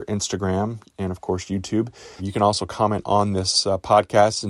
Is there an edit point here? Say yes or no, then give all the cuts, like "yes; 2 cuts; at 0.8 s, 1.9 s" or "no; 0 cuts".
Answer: yes; 1 cut; at 2.2 s